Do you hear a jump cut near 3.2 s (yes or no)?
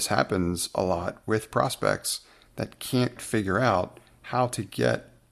yes